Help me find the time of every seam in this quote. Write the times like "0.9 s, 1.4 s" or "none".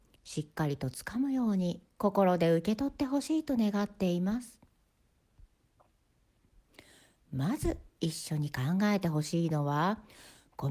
none